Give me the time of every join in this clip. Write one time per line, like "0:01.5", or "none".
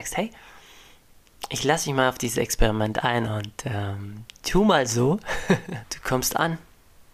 0:05.8